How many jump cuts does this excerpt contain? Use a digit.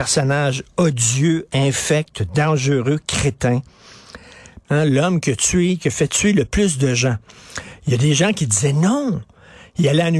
1